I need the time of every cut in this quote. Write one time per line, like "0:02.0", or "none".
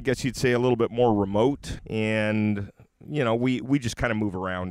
0:01.8